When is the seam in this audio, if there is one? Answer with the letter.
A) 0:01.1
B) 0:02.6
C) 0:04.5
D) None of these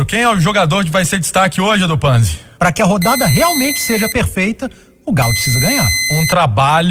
B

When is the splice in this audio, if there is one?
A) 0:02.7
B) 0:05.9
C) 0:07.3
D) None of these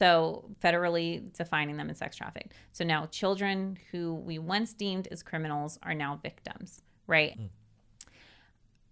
C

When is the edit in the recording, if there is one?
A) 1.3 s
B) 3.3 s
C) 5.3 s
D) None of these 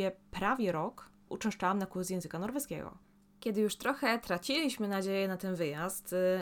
A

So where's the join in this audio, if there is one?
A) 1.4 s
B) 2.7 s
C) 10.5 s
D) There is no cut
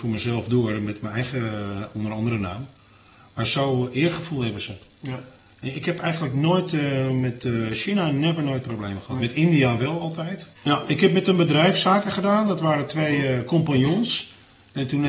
C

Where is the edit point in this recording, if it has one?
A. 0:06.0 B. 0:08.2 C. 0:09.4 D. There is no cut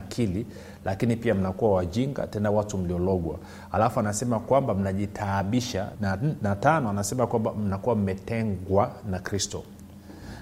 A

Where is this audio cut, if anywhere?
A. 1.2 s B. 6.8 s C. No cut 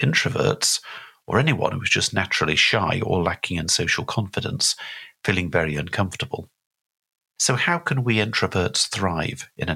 C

